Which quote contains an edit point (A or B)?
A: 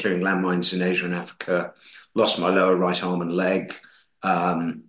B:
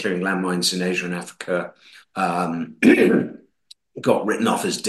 B